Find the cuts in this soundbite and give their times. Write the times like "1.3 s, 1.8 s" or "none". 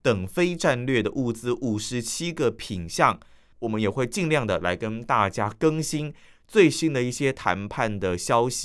3.5 s

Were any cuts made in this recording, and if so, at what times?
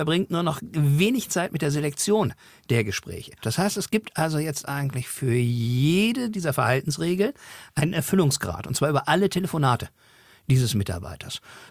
3.4 s

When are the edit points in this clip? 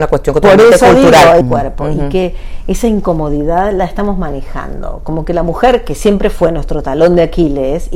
1.4 s

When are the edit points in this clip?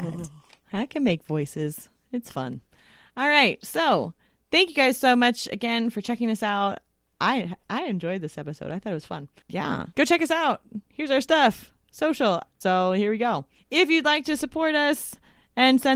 12.6 s

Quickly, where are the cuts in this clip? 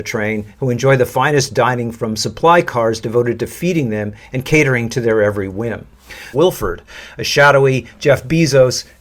6.3 s

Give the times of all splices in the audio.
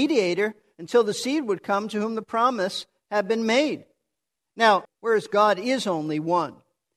4.9 s

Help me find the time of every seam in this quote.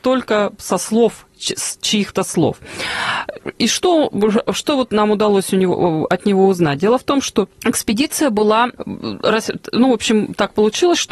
7.5 s, 8.8 s

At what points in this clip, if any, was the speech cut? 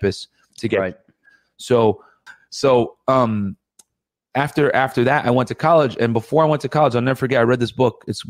2.3 s

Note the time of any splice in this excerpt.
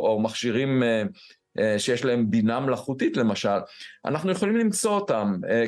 none

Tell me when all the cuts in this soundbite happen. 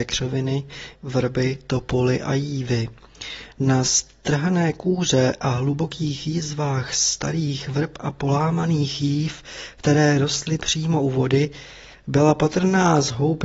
0.9 s

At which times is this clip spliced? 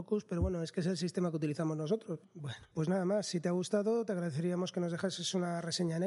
2.2 s

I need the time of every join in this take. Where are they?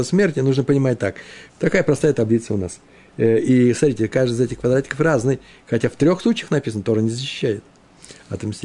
1.5 s

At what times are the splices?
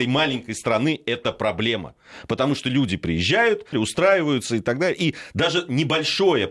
3.7 s

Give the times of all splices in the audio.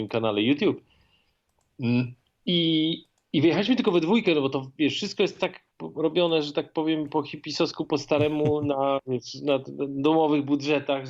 none

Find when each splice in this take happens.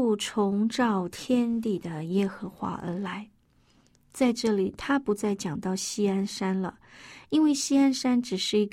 none

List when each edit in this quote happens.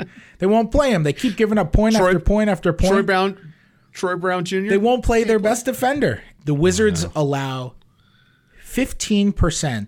6.4 s

